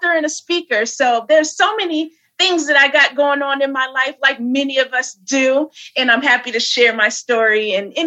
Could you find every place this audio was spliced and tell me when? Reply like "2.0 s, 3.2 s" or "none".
none